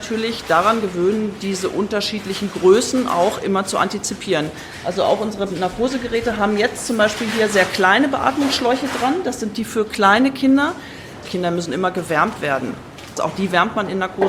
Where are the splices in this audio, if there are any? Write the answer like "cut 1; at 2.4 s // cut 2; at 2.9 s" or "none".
cut 1; at 11.2 s // cut 2; at 13.2 s